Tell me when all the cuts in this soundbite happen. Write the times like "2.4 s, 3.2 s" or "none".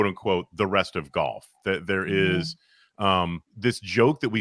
3.5 s